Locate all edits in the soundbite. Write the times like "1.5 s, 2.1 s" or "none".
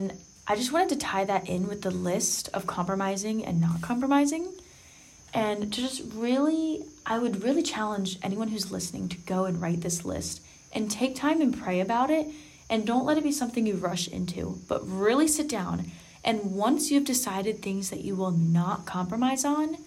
none